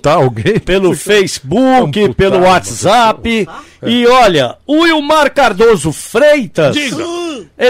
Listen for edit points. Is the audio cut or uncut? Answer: uncut